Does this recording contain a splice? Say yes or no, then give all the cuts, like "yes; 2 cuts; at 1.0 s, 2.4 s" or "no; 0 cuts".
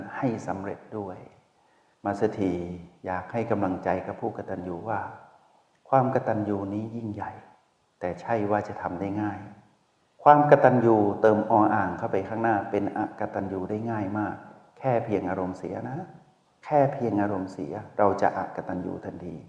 no; 0 cuts